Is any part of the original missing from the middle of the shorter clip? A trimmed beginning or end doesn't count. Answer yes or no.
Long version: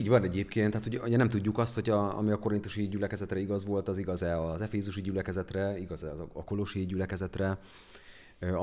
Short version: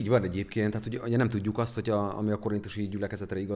no